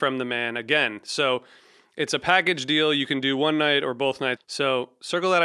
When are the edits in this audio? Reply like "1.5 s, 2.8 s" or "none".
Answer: 4.4 s